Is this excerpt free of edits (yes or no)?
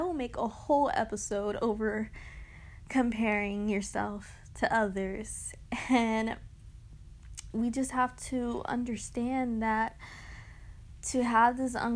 no